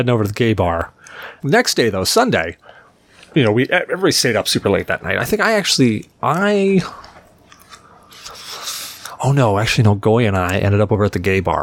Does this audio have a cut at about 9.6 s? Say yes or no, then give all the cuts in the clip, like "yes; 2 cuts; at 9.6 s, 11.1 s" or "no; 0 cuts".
no; 1 cut; at 1.4 s